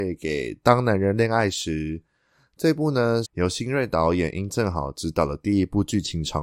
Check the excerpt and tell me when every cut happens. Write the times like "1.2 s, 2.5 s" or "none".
3.2 s